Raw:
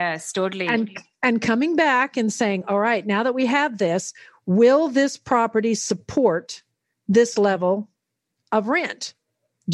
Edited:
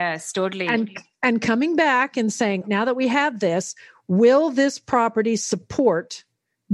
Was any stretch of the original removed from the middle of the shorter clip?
yes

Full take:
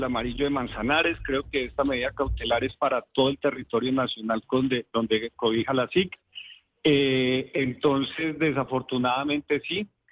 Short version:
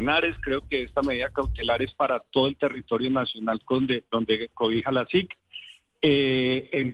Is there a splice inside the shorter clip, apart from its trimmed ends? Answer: no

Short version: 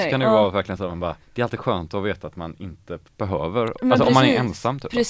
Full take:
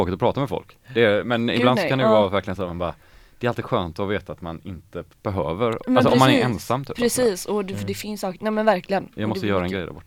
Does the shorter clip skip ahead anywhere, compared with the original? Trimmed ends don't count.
yes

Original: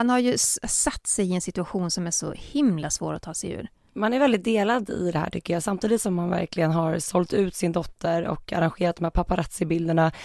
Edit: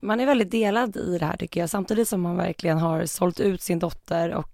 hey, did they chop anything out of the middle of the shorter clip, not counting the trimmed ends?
no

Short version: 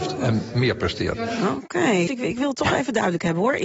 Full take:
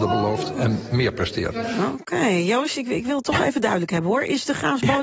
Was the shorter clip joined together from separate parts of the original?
yes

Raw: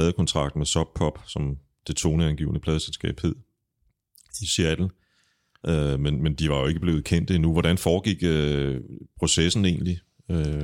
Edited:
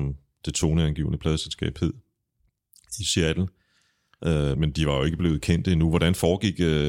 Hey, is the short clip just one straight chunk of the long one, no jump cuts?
no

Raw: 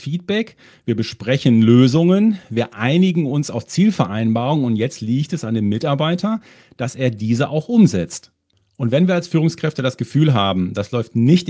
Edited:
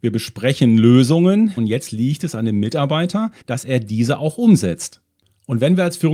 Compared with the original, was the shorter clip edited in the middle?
yes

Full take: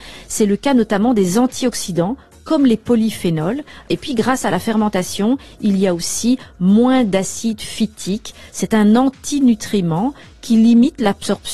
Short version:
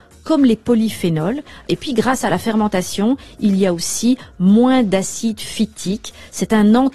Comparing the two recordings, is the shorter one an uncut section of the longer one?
yes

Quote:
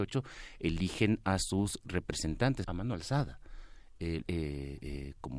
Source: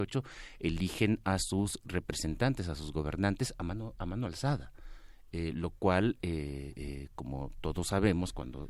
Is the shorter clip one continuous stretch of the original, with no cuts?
no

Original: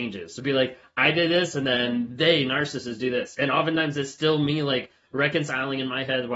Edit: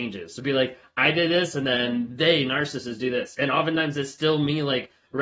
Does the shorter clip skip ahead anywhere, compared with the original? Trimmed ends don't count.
no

